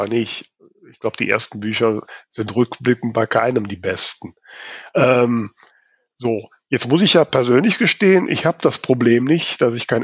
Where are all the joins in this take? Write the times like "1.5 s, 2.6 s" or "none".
none